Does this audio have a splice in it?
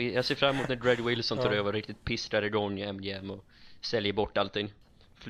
no; 0 cuts

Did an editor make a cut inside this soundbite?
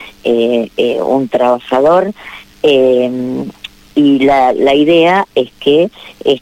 no; 0 cuts

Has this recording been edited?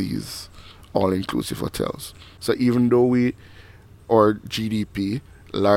no; 0 cuts

